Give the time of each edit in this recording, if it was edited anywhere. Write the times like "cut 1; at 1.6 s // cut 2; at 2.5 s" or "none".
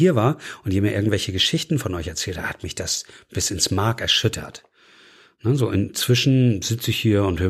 none